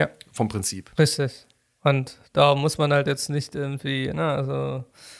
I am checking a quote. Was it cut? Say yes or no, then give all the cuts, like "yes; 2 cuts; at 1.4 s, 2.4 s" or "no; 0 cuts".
yes; 1 cut; at 0.9 s